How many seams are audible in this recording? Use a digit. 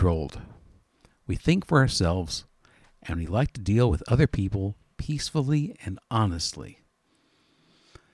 0